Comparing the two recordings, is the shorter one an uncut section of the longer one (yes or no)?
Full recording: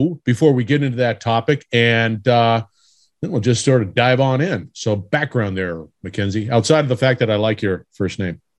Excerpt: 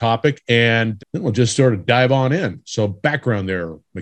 no